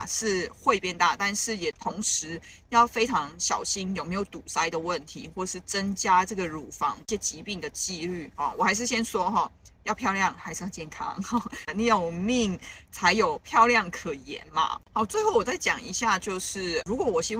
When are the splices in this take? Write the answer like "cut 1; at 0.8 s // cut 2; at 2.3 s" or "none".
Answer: none